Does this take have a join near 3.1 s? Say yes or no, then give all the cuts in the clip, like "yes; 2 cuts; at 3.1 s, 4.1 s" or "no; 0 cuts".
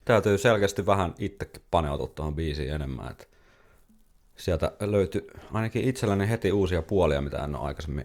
no; 0 cuts